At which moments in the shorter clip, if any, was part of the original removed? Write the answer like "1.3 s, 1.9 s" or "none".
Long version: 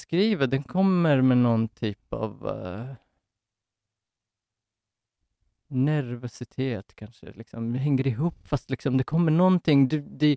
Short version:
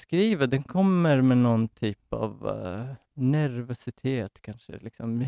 3.0 s